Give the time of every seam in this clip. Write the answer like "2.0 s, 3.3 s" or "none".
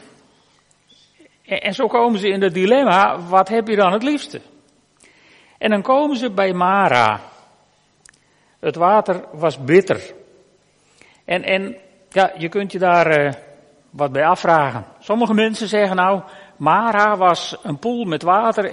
none